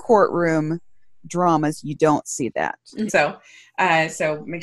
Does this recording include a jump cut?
yes; 1 cut; at 3.1 s

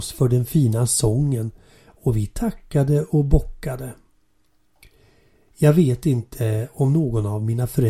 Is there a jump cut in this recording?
no; 0 cuts

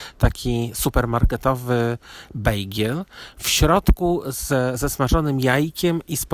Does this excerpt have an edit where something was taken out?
no; 0 cuts

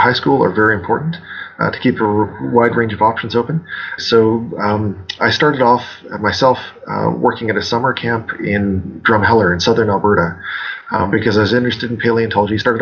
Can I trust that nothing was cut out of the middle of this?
no; 1 cut; at 4.0 s

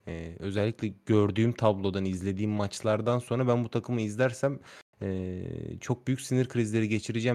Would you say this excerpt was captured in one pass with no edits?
yes; 0 cuts

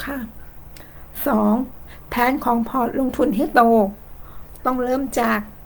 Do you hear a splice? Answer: no; 0 cuts

